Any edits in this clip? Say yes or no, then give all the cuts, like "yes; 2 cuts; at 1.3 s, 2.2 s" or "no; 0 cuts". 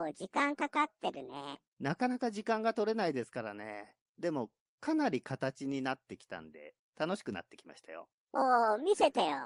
no; 0 cuts